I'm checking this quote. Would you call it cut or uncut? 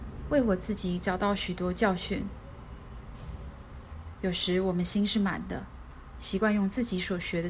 cut